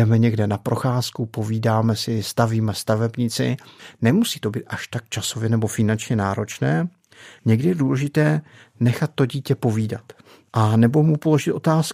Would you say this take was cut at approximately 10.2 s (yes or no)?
no